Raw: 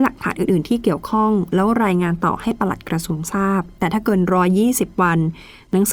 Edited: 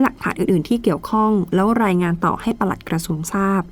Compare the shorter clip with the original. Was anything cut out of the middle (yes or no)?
no